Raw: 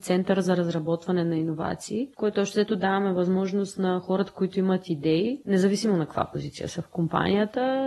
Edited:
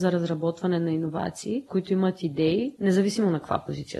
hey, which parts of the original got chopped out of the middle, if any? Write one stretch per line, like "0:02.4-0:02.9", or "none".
0:02.1-0:04.3